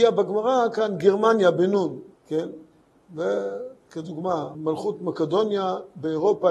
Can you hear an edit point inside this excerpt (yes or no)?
yes